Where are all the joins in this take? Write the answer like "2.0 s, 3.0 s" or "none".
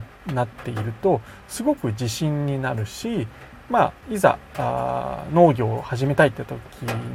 none